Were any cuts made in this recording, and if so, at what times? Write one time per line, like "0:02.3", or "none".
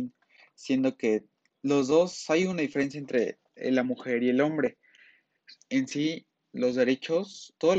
0:03.5
0:05.5